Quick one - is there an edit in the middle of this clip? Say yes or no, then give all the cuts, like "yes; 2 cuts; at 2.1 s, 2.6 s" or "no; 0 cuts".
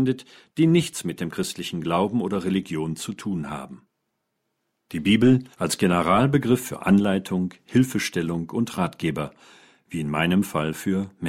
yes; 1 cut; at 5.5 s